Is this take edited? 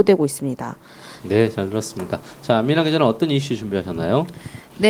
yes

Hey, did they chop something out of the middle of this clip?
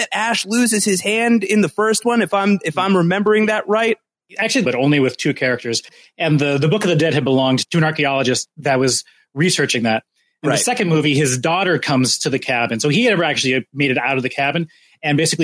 yes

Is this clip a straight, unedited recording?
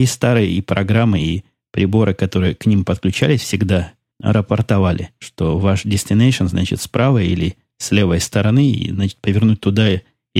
yes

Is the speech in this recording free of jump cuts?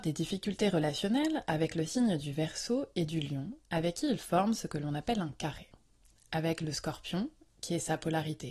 yes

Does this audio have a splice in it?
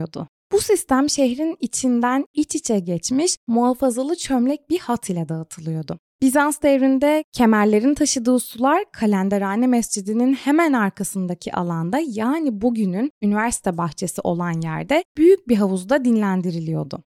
yes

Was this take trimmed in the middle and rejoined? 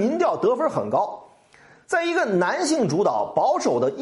no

